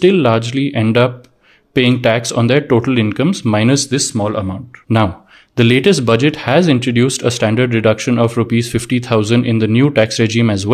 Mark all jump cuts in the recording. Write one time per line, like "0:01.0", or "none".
0:04.8